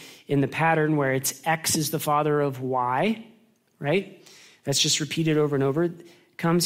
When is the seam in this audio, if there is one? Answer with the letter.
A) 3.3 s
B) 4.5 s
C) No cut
C